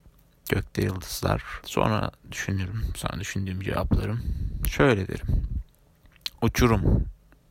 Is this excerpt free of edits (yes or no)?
no